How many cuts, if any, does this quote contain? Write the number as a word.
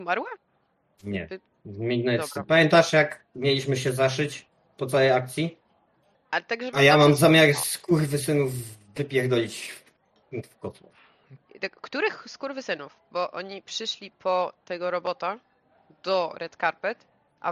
one